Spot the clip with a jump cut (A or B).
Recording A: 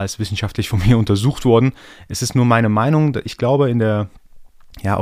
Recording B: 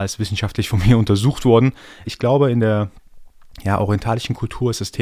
B